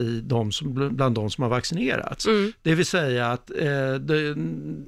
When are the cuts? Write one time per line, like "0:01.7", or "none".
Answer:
none